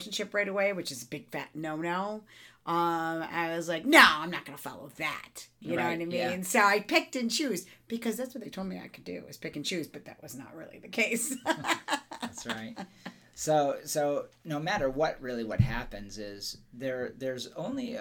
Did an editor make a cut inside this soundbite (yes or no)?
no